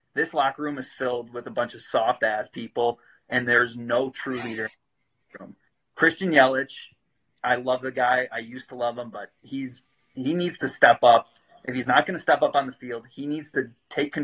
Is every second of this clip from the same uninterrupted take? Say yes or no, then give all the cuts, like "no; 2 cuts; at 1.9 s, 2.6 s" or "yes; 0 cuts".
yes; 0 cuts